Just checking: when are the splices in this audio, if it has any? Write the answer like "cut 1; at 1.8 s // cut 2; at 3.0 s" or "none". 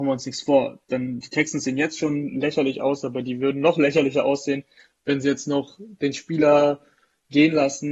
cut 1; at 1.2 s

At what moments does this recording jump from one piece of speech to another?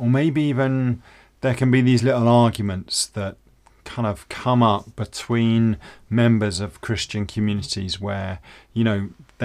none

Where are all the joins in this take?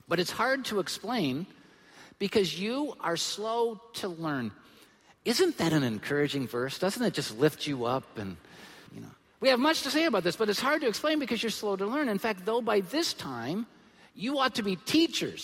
cut 1; at 8.9 s // cut 2; at 11.5 s

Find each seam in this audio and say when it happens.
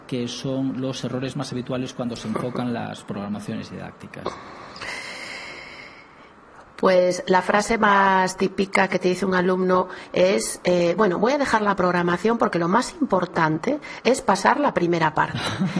none

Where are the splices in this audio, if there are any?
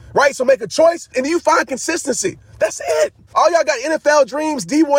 cut 1; at 1.1 s // cut 2; at 3.3 s

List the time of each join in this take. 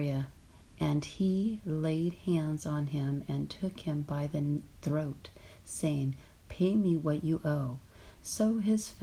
none

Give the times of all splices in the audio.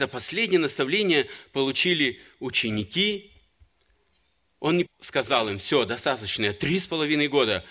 cut 1; at 4.9 s

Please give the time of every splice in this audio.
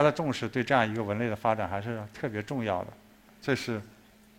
cut 1; at 3.2 s

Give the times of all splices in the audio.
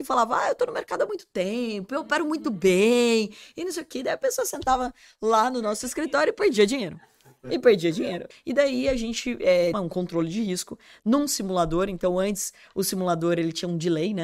cut 1; at 8.3 s // cut 2; at 9.7 s

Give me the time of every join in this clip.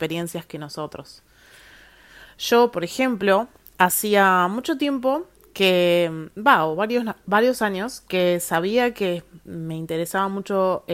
none

